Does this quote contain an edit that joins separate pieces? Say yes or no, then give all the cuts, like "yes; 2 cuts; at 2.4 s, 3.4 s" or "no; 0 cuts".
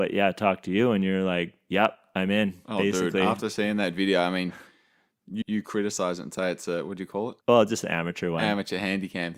yes; 2 cuts; at 5.4 s, 7.4 s